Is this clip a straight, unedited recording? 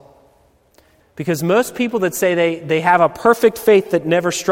no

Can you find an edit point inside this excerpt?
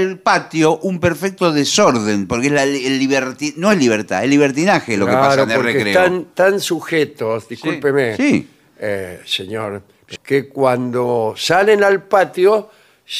yes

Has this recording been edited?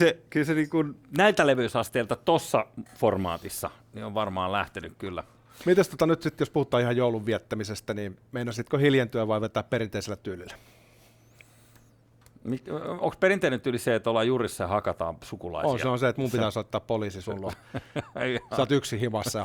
no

